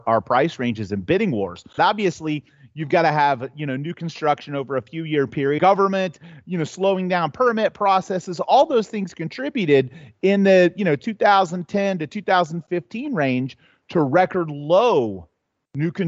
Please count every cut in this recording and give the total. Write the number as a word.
two